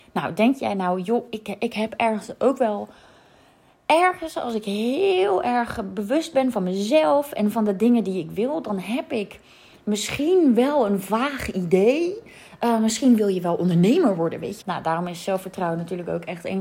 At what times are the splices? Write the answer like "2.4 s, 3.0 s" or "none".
14.6 s